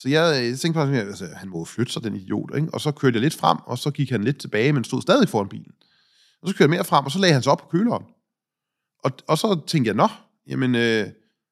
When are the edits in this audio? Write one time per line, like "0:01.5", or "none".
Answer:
none